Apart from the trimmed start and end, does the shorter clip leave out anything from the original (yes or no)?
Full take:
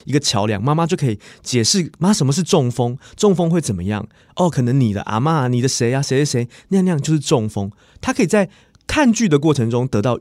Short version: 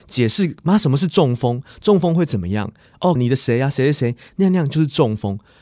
yes